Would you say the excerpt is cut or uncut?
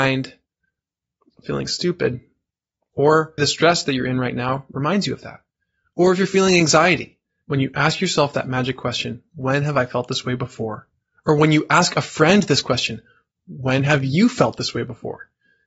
cut